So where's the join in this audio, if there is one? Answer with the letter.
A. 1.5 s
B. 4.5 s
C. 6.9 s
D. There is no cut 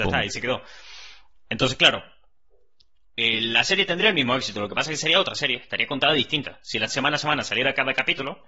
C